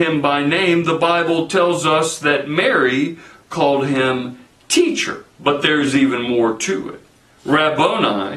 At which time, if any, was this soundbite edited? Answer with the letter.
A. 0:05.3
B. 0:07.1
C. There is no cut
A